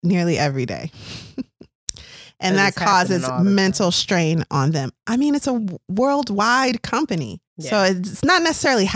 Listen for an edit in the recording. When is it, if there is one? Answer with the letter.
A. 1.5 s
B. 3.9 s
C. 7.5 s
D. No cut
C